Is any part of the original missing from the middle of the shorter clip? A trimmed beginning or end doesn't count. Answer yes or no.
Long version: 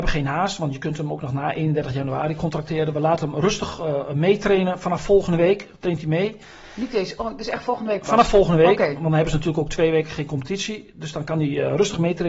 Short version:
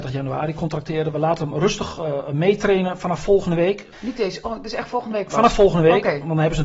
yes